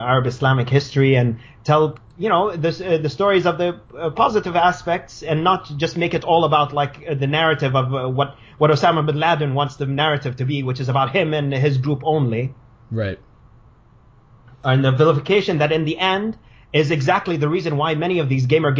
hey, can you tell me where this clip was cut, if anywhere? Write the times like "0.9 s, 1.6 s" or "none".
none